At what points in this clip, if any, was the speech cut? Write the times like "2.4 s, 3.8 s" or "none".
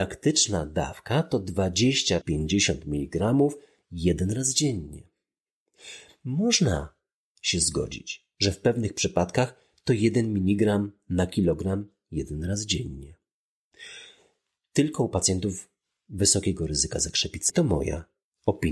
2.2 s, 17.5 s